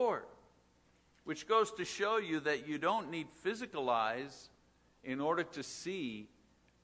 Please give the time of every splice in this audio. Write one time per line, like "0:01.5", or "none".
none